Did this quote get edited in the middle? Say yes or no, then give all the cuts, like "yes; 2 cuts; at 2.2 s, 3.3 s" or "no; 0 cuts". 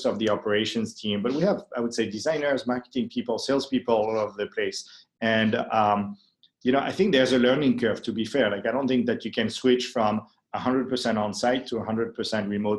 no; 0 cuts